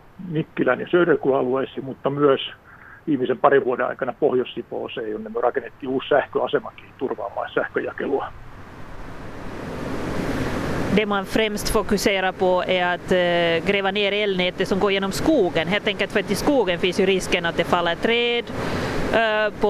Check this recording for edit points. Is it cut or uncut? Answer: uncut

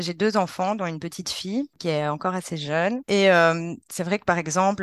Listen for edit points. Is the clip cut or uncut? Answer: uncut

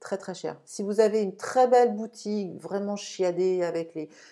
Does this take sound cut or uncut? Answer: uncut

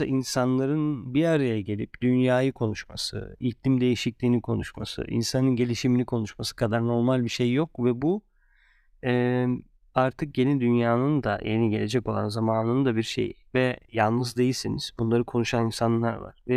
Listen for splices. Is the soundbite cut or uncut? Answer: uncut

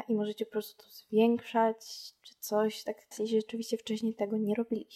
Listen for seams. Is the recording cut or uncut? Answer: cut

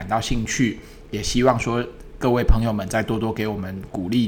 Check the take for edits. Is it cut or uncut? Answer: uncut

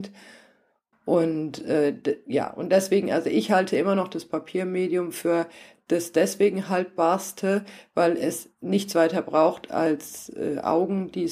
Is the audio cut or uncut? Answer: cut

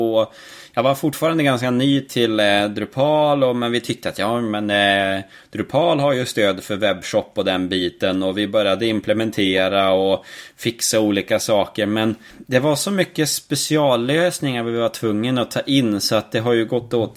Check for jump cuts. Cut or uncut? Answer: cut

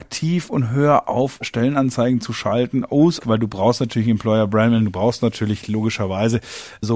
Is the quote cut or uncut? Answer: cut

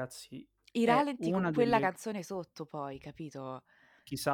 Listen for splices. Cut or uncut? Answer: uncut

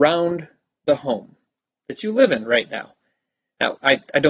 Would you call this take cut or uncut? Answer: uncut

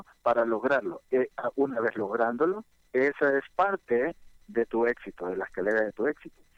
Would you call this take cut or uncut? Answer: uncut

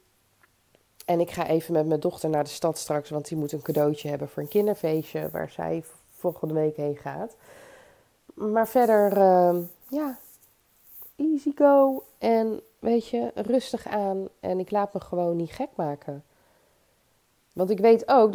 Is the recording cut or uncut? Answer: uncut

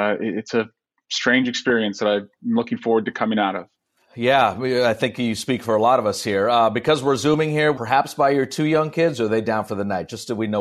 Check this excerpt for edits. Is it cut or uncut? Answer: cut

